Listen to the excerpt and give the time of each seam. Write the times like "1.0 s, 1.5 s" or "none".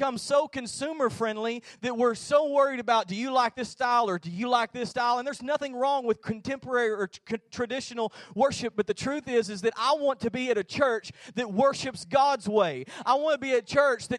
none